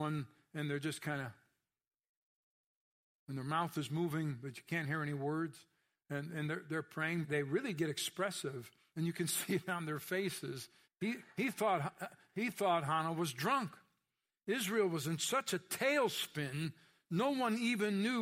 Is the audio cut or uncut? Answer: cut